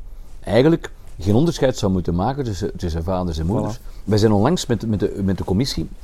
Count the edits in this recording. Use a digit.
0